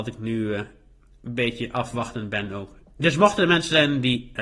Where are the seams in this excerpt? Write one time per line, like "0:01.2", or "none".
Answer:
0:02.8

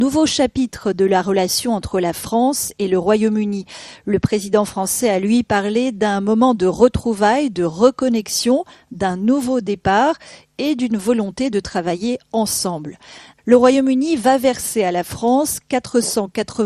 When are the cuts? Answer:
0:13.4

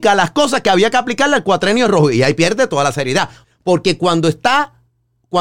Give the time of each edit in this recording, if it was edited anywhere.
0:03.4

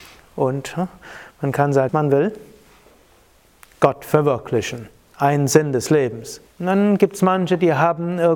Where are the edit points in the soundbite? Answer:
0:01.9
0:06.4

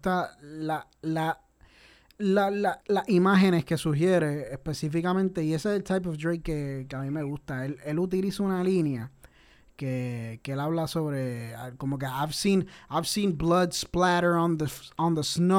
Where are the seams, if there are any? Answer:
0:02.8

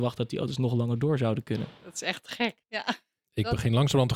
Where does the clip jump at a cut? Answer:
0:02.6

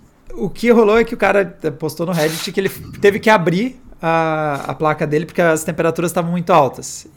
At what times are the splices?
none

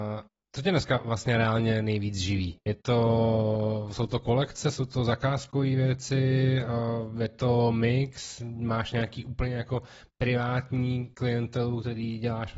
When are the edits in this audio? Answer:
none

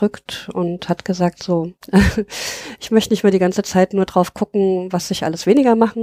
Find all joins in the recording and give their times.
none

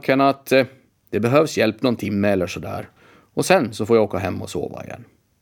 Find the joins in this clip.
none

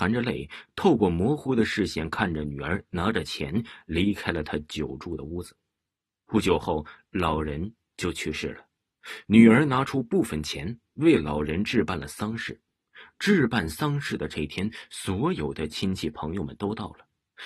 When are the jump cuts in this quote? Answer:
none

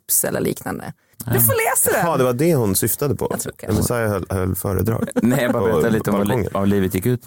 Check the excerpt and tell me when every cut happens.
0:01.1

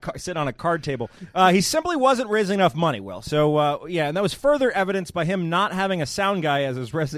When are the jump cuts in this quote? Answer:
none

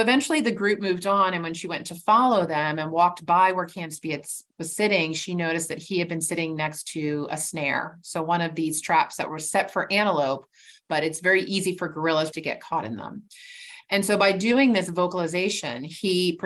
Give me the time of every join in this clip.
0:12.3

